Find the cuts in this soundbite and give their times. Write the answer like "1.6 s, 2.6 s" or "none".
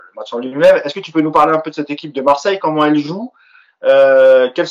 none